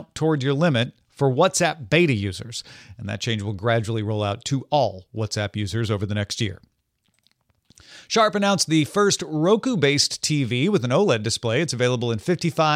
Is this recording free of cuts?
yes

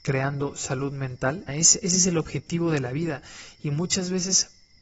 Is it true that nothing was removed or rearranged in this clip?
no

